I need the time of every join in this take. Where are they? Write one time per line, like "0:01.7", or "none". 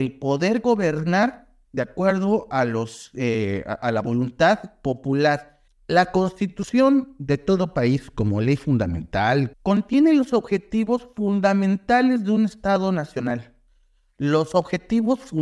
0:05.7
0:09.5